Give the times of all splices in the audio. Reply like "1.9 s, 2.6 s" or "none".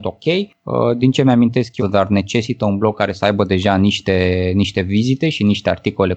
1.8 s